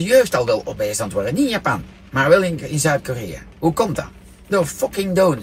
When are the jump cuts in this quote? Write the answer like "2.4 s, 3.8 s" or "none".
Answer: none